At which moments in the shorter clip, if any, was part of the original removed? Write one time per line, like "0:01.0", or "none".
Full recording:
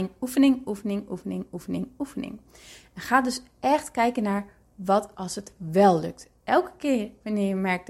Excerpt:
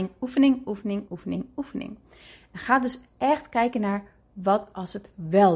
0:01.1

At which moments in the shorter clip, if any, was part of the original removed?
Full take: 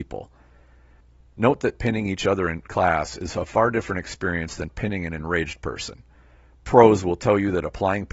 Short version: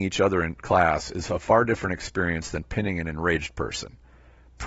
none

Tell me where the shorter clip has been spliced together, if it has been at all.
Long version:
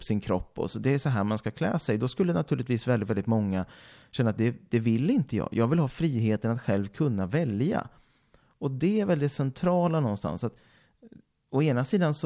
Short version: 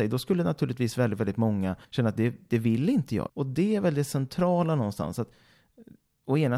0:01.8
0:03.3

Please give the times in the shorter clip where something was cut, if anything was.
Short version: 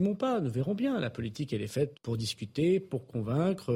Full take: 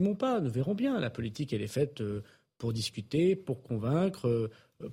0:01.9

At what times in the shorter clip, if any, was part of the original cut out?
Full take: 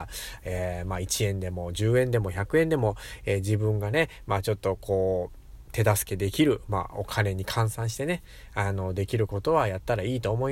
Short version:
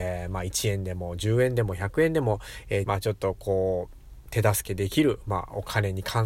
0:02.8

